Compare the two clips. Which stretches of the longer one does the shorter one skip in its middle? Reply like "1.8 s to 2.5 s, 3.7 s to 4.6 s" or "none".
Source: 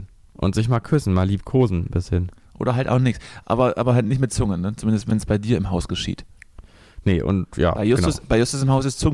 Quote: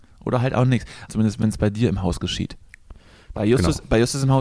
3.4 s to 4.8 s, 7.0 s to 7.7 s